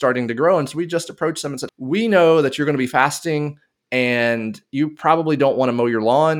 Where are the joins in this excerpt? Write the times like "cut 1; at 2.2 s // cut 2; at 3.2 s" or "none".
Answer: cut 1; at 1.7 s